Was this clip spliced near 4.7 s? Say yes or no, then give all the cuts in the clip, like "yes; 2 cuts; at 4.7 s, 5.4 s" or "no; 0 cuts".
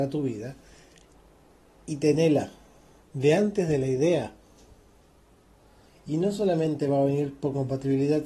no; 2 cuts; at 3.0 s, 5.9 s